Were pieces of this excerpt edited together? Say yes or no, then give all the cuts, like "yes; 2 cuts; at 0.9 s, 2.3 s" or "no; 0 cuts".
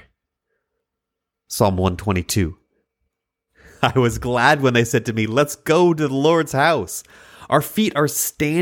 no; 0 cuts